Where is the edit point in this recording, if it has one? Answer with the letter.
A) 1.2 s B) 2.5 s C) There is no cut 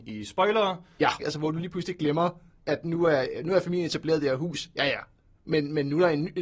A